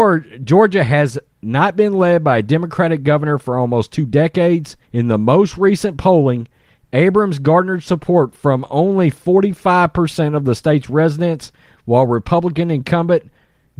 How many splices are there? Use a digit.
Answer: 1